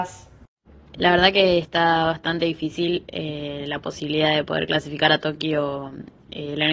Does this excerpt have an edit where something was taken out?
yes; 1 cut; at 0.9 s

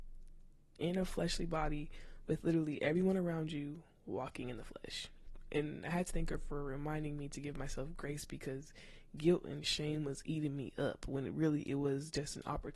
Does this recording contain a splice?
no; 0 cuts

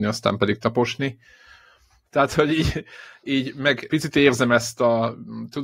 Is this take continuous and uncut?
no; 2 cuts; at 2.1 s, 3.9 s

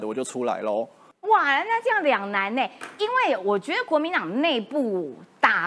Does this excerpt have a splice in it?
yes; 1 cut; at 1.1 s

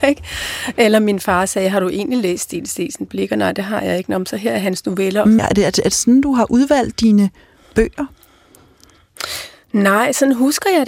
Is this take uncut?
no; 1 cut; at 5.4 s

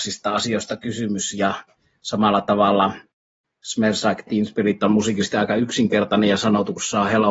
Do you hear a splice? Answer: no; 0 cuts

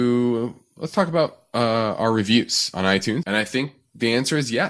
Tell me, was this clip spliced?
yes; 1 cut; at 3.2 s

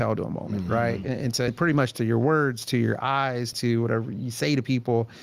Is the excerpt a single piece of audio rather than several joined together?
no; 2 cuts; at 1.5 s, 3.5 s

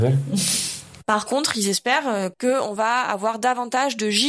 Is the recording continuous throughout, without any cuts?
no; 2 cuts; at 1.0 s, 2.3 s

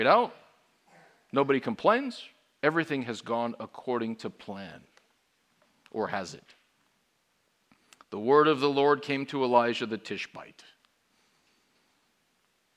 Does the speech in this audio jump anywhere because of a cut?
yes; 1 cut; at 2.6 s

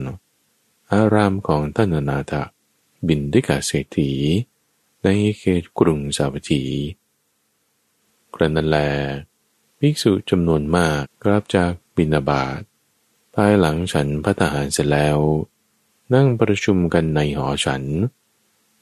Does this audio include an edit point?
yes; 1 cut; at 11.0 s

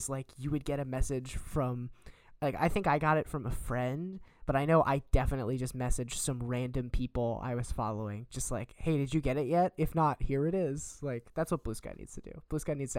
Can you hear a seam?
no; 0 cuts

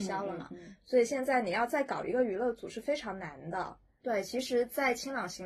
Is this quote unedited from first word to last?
no; 1 cut; at 4.0 s

